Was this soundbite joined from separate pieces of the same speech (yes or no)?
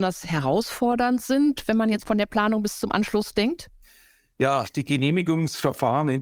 no